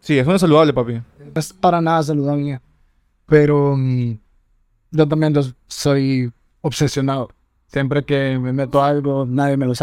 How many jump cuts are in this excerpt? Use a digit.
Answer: 0